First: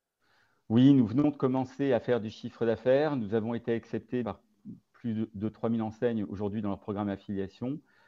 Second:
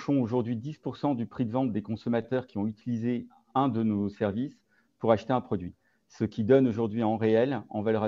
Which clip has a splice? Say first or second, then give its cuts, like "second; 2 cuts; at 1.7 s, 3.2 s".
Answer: first; 1 cut; at 4.2 s